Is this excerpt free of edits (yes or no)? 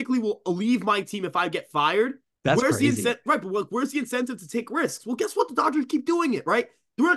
no